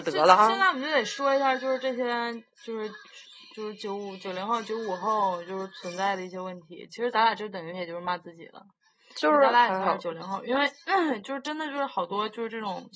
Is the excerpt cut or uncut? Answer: uncut